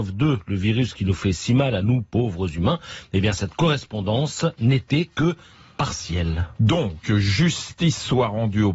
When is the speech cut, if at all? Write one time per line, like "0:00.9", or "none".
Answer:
none

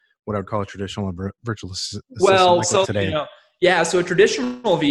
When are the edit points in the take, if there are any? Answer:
0:02.8

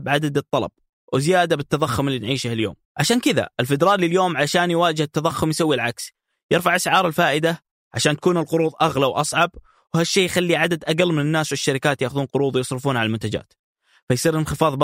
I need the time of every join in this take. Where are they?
0:02.8

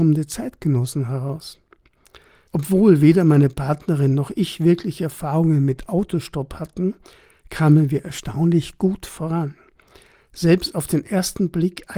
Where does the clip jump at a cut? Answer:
0:02.5

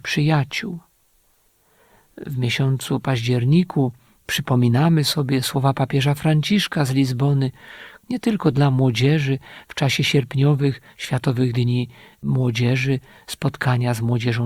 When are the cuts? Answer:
0:08.0

